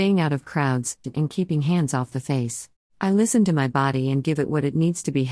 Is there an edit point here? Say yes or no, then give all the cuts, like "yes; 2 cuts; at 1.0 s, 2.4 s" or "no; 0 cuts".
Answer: yes; 2 cuts; at 1.0 s, 2.9 s